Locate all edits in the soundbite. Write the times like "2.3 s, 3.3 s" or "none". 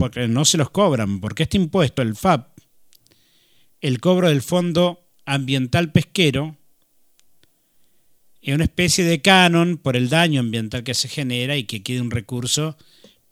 none